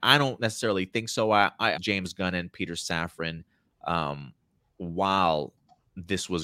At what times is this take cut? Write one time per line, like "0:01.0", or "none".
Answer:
0:01.7

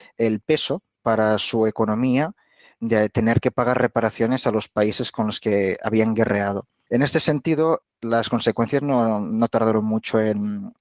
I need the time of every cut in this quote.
none

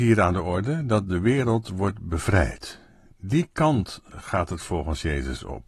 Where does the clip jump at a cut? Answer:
none

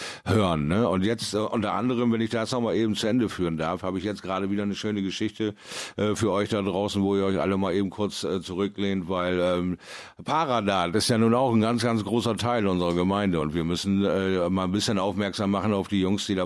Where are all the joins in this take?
none

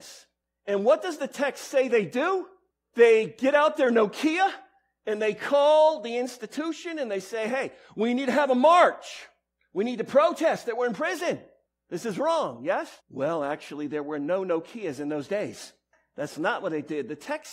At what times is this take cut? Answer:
0:13.0

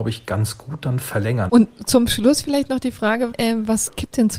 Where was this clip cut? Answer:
0:01.5
0:03.3

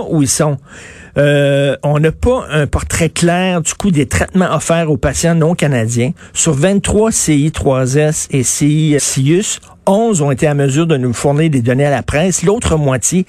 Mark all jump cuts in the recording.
0:09.0

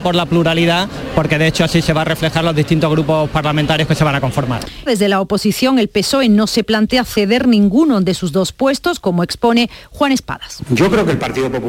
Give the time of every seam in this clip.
0:04.9

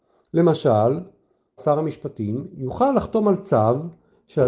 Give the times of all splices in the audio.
0:01.6

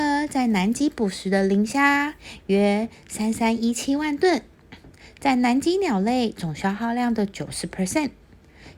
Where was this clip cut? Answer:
none

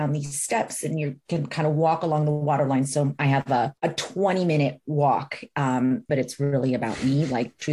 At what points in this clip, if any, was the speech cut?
0:03.8
0:06.1

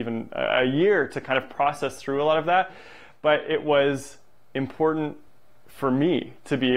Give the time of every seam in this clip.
none

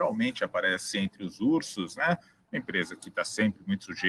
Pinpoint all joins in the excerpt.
none

